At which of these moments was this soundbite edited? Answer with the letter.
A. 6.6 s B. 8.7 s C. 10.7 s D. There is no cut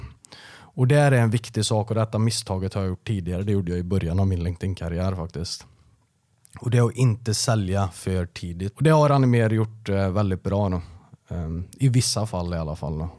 B